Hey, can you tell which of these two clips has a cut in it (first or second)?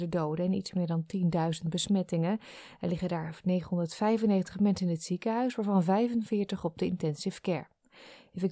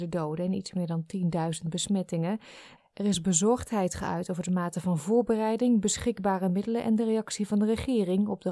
second